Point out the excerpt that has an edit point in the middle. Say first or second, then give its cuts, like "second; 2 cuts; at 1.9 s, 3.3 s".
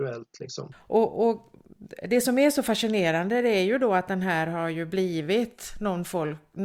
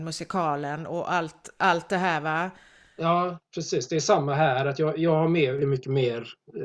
second; 1 cut; at 5.6 s